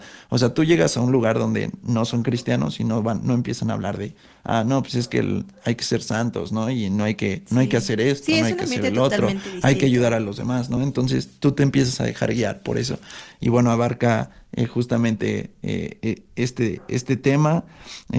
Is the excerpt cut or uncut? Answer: uncut